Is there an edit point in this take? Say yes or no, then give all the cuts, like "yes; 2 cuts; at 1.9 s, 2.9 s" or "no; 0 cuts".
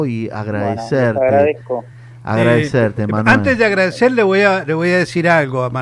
no; 0 cuts